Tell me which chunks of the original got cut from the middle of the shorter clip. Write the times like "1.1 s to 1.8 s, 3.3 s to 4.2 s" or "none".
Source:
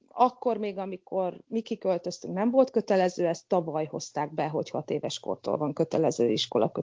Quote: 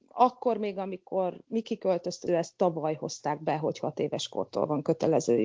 2.3 s to 3.2 s